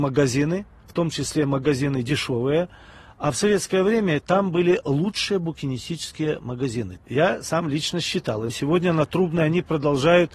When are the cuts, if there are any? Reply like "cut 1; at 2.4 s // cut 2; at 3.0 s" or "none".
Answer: cut 1; at 7.0 s // cut 2; at 8.5 s